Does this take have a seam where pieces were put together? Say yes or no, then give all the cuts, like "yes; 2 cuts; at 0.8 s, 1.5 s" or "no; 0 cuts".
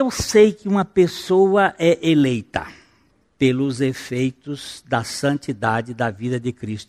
no; 0 cuts